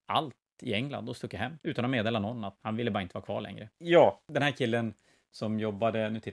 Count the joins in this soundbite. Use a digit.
2